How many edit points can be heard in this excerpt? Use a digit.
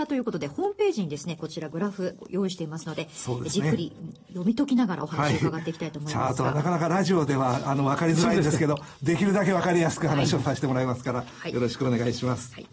0